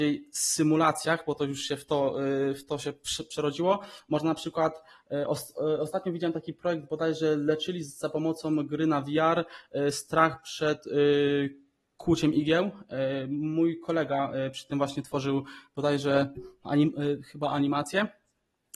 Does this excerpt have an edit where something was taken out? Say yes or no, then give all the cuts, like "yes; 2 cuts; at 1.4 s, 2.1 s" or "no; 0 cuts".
no; 0 cuts